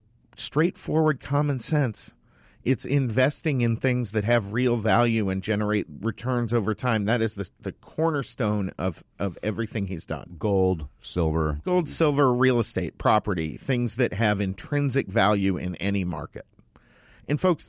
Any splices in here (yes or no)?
no